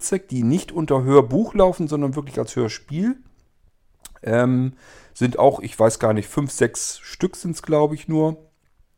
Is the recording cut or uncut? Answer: uncut